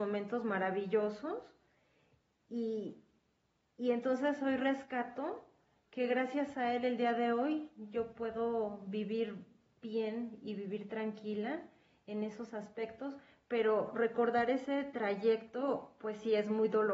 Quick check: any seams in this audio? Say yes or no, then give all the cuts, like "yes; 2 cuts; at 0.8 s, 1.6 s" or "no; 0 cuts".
no; 0 cuts